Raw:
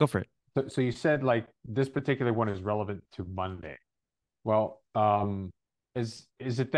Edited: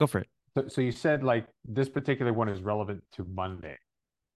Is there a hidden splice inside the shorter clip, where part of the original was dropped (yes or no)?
no